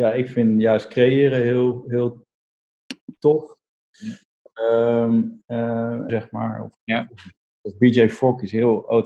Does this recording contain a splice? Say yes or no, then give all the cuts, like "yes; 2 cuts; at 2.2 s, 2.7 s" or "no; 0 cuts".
yes; 1 cut; at 6.1 s